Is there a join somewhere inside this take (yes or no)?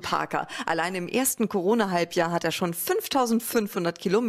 no